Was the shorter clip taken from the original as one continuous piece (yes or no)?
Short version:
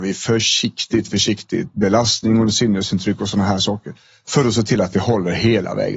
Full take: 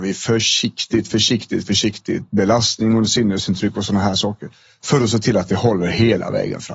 no